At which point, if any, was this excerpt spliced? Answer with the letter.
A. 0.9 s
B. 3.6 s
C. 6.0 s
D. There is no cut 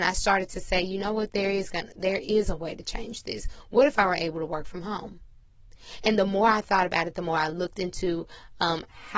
D